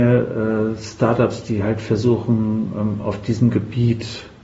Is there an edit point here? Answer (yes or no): no